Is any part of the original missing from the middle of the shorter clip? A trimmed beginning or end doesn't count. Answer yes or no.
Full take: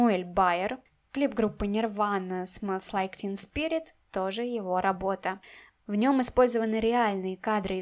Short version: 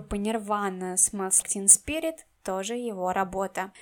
yes